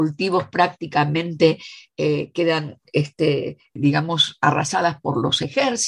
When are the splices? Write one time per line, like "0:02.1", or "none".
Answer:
0:03.8

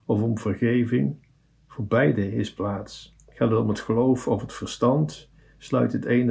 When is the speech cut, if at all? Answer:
none

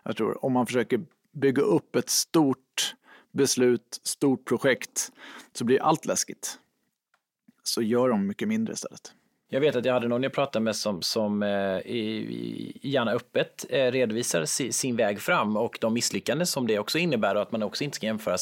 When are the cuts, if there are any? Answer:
none

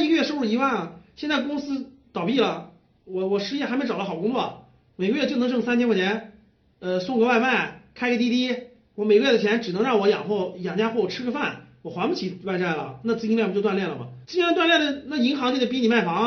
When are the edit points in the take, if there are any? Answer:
0:14.2

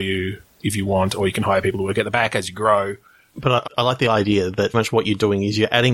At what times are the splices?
0:03.7
0:04.7

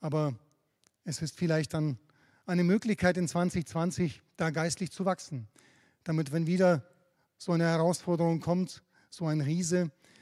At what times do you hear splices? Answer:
none

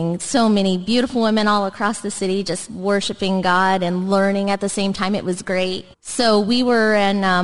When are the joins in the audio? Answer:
0:05.9

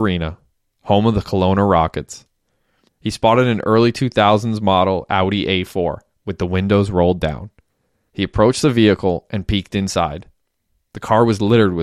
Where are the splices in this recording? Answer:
0:02.9

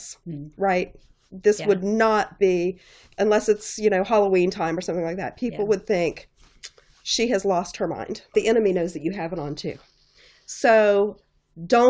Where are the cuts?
0:08.3

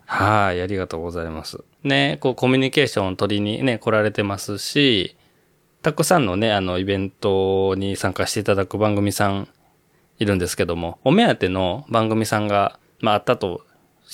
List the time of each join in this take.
0:01.7

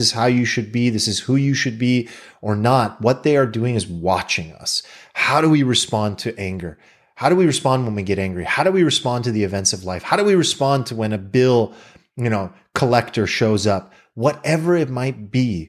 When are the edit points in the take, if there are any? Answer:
none

